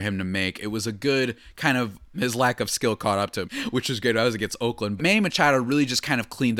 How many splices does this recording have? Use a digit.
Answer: 3